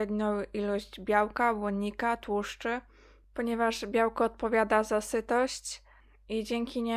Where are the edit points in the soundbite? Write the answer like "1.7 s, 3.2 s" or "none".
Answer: none